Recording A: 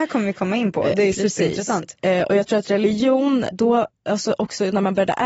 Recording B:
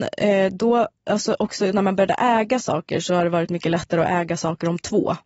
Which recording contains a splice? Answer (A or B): A